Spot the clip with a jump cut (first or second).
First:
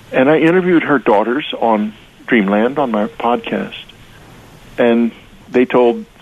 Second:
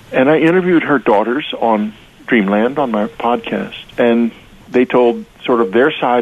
second